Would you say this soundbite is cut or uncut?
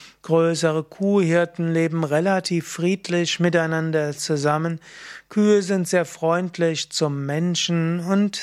uncut